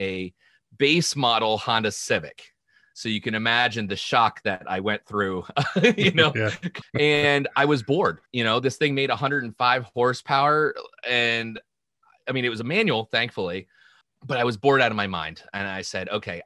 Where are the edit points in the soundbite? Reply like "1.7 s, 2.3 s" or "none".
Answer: 6.8 s, 8.3 s, 14.0 s